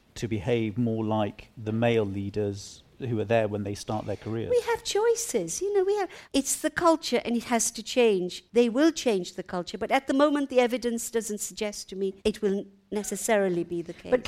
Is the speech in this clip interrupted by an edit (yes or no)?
yes